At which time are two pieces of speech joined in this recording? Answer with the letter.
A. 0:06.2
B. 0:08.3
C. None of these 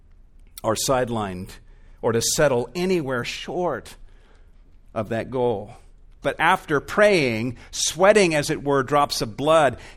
A